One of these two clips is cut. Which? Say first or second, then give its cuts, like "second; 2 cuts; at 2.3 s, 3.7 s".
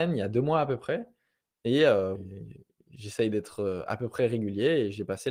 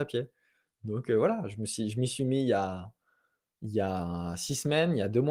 first; 1 cut; at 2.2 s